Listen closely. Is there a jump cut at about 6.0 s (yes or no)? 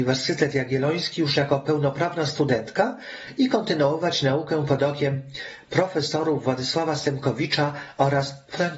no